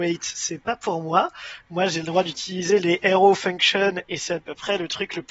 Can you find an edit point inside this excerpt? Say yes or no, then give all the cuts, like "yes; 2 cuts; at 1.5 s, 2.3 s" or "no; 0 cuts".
no; 0 cuts